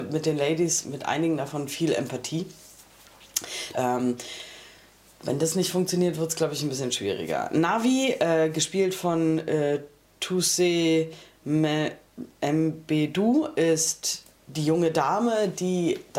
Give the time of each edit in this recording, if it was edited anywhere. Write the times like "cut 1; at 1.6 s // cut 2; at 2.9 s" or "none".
cut 1; at 3.7 s